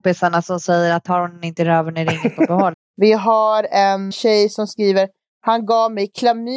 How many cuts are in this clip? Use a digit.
2